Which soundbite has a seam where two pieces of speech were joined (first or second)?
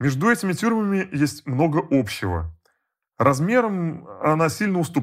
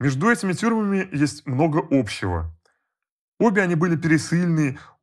first